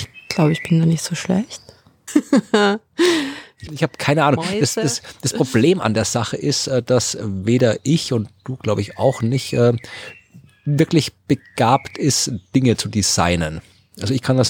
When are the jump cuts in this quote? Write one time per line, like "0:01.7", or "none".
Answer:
0:02.1
0:03.7